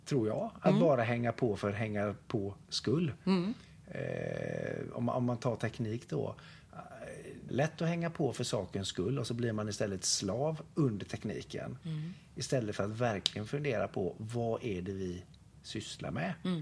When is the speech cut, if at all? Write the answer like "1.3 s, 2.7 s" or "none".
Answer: 7.5 s